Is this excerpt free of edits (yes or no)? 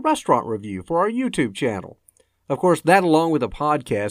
yes